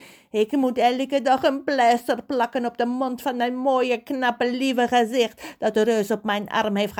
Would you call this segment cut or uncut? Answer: uncut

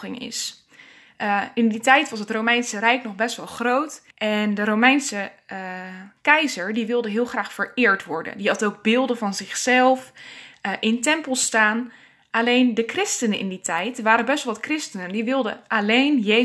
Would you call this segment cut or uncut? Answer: cut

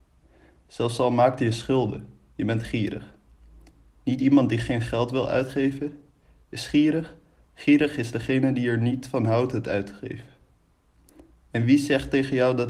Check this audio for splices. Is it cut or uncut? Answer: uncut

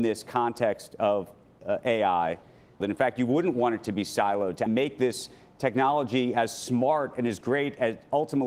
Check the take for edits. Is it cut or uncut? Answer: cut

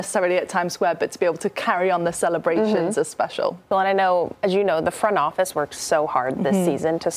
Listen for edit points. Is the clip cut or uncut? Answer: cut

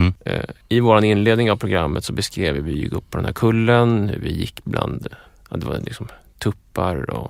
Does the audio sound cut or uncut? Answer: uncut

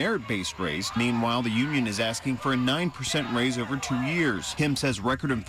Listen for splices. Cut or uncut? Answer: cut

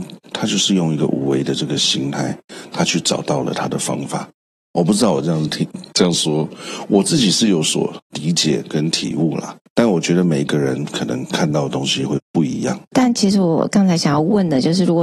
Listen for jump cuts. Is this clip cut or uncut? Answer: uncut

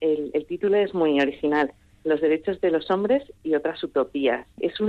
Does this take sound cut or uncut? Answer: uncut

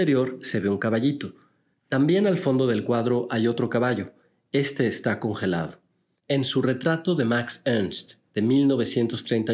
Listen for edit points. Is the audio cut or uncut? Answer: cut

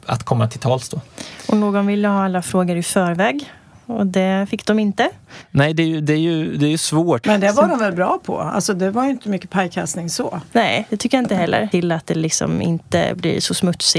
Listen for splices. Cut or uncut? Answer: cut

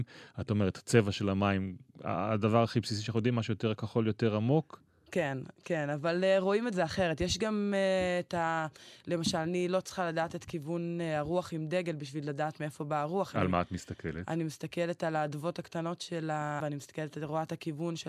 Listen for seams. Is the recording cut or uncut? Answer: cut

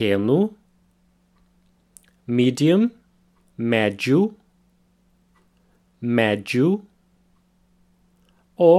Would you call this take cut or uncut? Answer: uncut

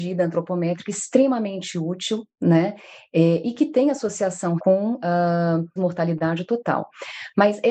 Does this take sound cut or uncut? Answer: cut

